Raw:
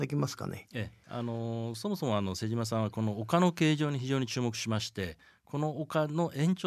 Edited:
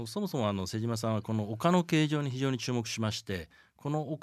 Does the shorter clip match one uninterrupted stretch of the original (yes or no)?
yes